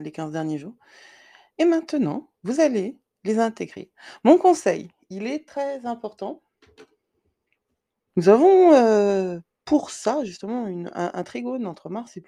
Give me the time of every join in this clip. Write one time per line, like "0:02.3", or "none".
0:02.4
0:08.1